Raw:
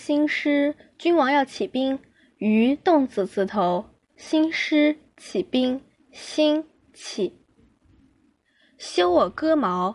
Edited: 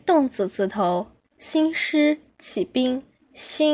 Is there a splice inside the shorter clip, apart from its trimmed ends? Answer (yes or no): no